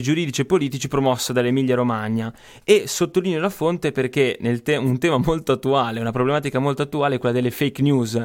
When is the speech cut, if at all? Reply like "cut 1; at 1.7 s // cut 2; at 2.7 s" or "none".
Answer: none